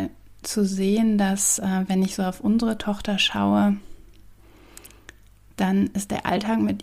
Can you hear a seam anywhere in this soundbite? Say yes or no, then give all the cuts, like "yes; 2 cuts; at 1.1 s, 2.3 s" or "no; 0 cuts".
no; 0 cuts